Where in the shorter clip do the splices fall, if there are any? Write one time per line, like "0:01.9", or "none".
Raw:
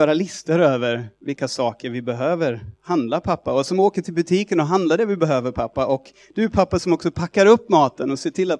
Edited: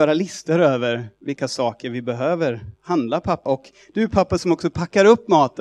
0:03.5